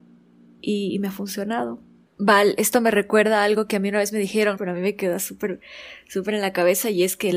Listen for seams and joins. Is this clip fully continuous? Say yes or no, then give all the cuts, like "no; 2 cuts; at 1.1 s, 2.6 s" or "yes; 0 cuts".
no; 2 cuts; at 2.1 s, 4.6 s